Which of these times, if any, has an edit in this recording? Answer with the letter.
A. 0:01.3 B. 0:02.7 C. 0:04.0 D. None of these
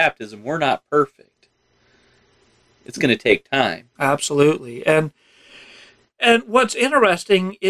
C